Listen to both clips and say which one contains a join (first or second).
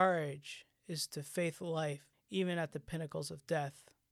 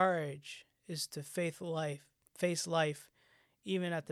first